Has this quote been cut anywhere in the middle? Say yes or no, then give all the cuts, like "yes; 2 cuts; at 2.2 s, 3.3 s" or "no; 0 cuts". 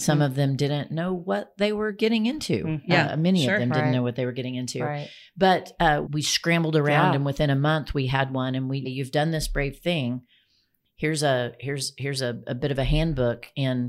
yes; 2 cuts; at 6.1 s, 8.8 s